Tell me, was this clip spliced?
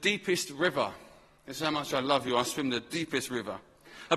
no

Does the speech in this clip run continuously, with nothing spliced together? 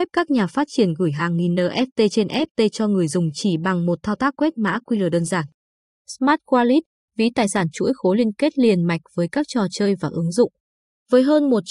yes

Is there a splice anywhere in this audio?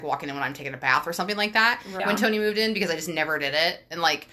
yes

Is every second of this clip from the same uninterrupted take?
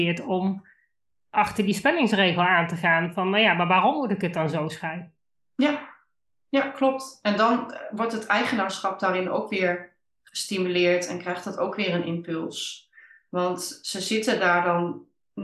yes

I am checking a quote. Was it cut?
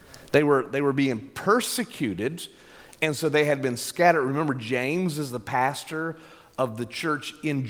no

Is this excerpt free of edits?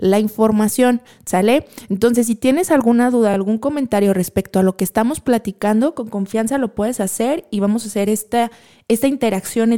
yes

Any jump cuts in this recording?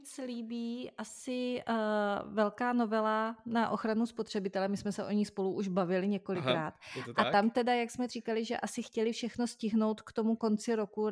no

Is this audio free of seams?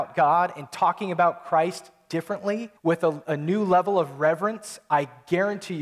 no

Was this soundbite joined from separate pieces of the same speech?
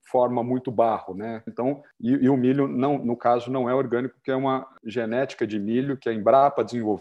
yes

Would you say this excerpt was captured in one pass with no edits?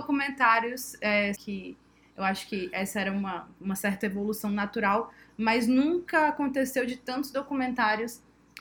no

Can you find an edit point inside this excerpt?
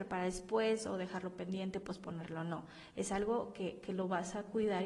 no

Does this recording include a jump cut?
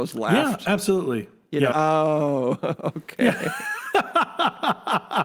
yes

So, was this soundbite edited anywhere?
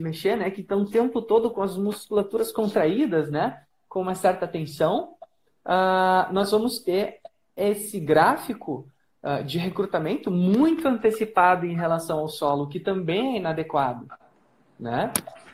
no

